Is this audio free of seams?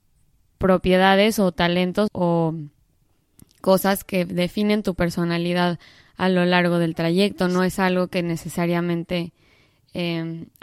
no; 1 cut; at 2.1 s

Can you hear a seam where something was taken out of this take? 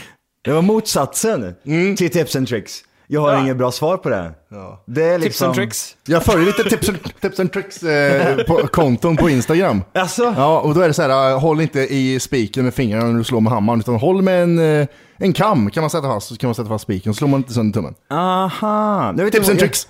yes; 1 cut; at 6.1 s

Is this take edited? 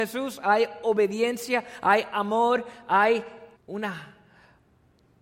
yes; 1 cut; at 3.6 s

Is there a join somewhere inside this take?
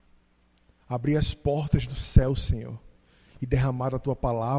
no; 0 cuts

